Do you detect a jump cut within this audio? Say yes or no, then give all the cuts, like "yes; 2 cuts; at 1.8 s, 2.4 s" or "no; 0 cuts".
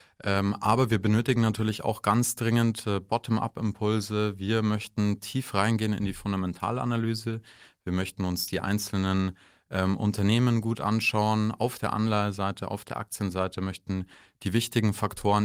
no; 0 cuts